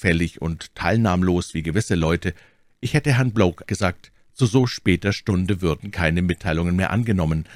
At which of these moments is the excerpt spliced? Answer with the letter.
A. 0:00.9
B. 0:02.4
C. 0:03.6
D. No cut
C